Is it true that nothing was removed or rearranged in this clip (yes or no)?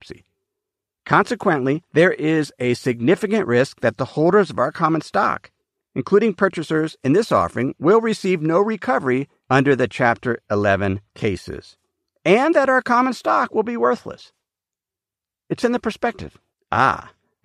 no